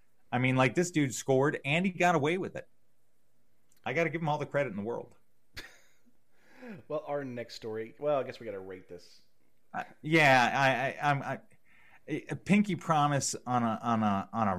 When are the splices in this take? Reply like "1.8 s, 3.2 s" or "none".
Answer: none